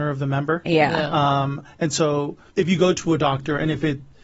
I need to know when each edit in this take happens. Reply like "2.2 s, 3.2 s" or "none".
2.5 s